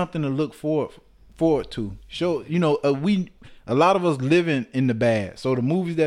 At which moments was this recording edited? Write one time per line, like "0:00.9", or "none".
none